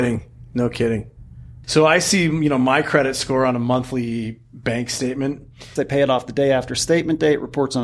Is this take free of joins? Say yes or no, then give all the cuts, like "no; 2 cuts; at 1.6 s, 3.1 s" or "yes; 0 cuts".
no; 2 cuts; at 1.6 s, 5.8 s